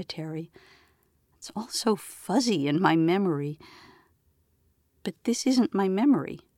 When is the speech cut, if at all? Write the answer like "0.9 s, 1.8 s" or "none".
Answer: none